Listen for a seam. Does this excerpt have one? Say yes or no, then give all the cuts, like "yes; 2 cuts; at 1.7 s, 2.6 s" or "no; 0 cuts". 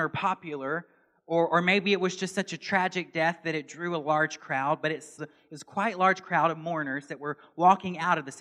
yes; 1 cut; at 5.2 s